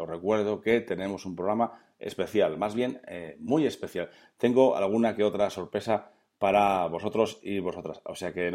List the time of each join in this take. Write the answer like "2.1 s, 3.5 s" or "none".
none